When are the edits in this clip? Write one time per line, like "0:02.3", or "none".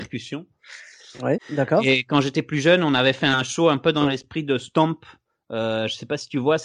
0:01.4